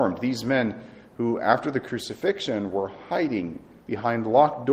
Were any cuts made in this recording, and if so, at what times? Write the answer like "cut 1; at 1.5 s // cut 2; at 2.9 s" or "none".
none